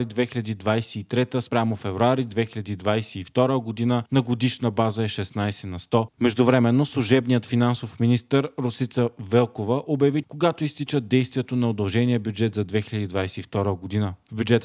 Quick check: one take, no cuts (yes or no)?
no